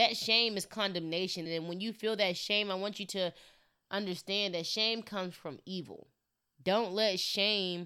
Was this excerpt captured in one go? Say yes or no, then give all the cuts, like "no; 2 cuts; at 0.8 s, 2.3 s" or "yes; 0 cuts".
no; 2 cuts; at 1.5 s, 6.5 s